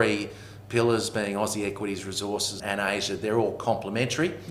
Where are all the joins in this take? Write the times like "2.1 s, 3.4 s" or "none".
2.6 s